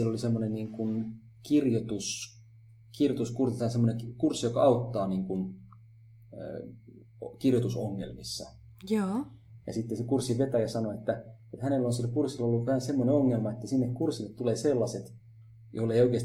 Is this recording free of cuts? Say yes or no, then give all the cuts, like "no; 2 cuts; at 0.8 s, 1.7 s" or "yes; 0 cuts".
yes; 0 cuts